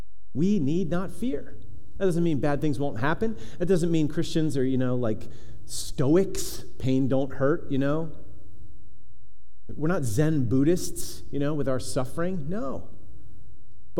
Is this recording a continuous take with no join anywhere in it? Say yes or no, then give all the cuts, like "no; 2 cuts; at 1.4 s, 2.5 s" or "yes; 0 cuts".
yes; 0 cuts